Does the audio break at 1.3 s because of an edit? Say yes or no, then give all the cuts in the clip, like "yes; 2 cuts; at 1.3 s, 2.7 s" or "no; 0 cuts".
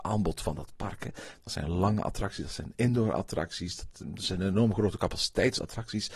yes; 1 cut; at 1.3 s